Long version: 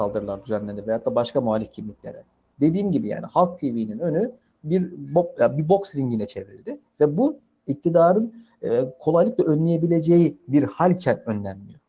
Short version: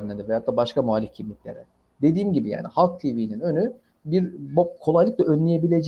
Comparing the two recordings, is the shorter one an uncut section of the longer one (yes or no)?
no